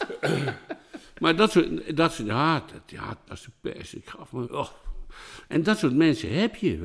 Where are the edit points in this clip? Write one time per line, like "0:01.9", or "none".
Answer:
0:03.3
0:04.4